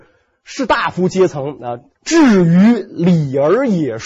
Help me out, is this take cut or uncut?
cut